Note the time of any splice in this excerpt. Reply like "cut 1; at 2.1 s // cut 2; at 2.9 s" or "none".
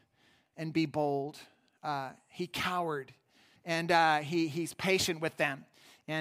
cut 1; at 3.6 s